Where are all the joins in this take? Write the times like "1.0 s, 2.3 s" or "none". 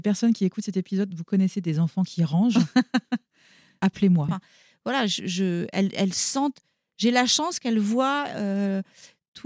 4.3 s